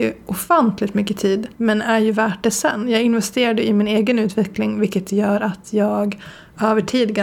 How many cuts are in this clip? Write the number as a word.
one